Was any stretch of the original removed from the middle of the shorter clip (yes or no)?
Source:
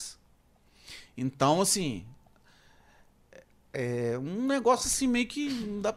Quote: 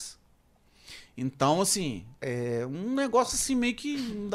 yes